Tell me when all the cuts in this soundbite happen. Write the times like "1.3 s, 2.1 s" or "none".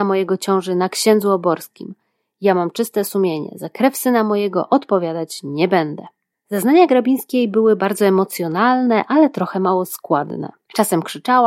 none